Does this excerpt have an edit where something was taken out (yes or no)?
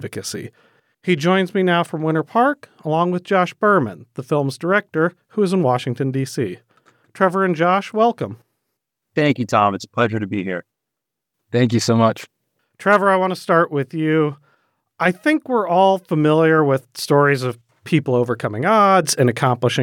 no